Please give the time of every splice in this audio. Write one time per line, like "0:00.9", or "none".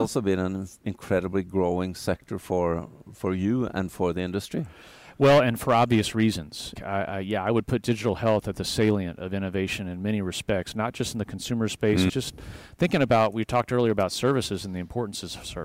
0:06.8
0:12.1

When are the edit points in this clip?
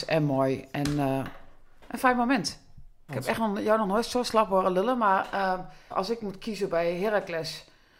0:03.1
0:05.9

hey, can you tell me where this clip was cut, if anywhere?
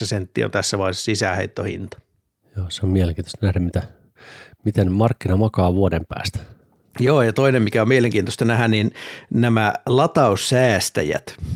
none

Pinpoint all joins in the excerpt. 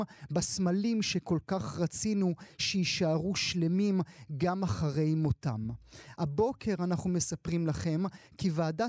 0:06.2

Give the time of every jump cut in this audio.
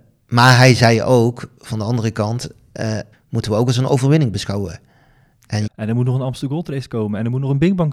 0:03.1
0:05.7

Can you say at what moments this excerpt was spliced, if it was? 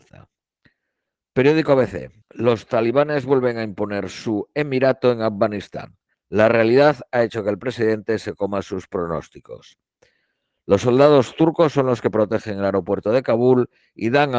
0:02.2
0:06.1

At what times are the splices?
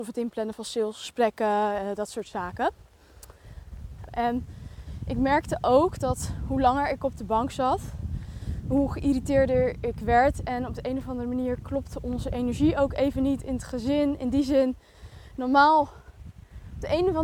0:04.1

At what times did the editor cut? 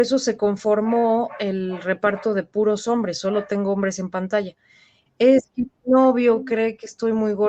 0:05.1

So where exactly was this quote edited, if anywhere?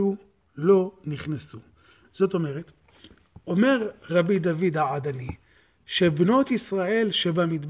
none

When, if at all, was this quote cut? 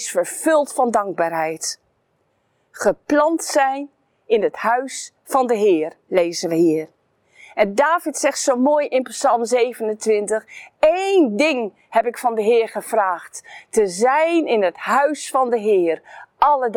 none

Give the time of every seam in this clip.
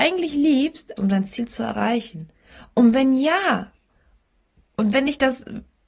0:01.0

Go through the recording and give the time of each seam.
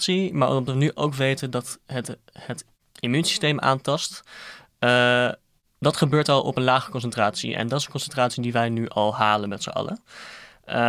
none

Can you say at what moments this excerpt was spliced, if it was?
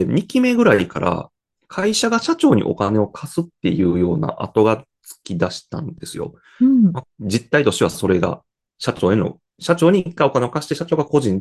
0:07.0

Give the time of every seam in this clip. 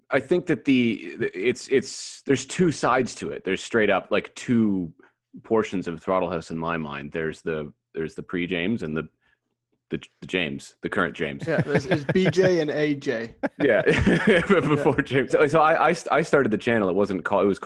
0:15.3

